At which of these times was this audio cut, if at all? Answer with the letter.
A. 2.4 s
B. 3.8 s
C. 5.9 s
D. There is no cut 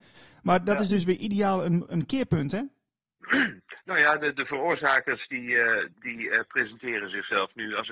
C